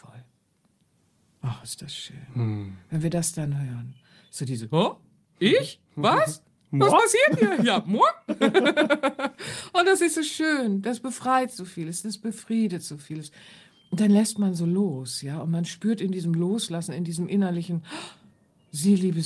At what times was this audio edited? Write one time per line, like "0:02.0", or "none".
none

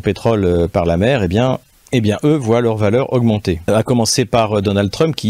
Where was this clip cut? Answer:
0:03.6

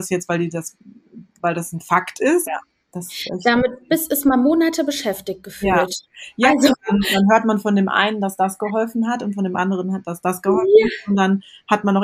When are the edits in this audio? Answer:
0:02.5

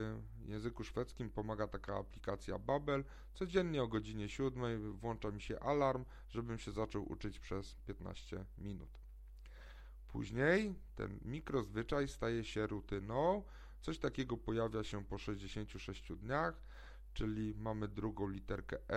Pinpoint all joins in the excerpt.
0:13.8

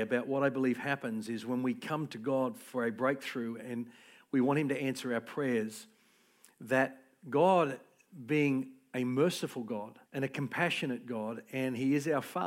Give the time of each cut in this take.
0:10.1

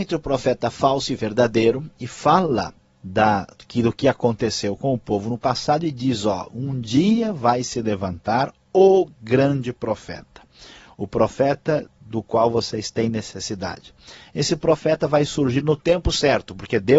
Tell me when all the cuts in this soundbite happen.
none

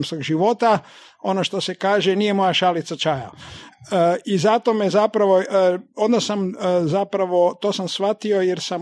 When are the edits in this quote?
none

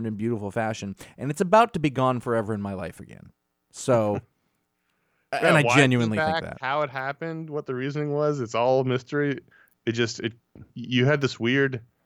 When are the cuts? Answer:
0:10.7

